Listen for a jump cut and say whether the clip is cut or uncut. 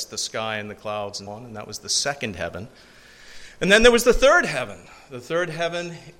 cut